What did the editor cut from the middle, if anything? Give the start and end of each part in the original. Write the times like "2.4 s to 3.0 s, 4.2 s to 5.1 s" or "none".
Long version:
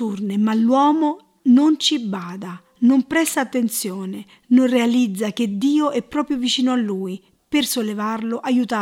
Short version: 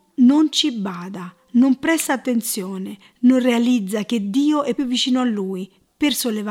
6.0 s to 6.3 s